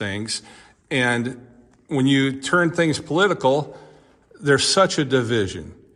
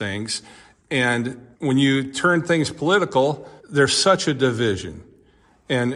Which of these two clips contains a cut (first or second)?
second